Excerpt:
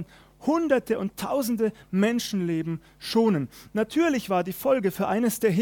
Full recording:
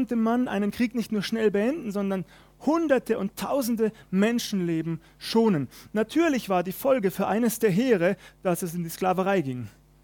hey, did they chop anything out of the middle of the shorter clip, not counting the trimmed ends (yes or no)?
no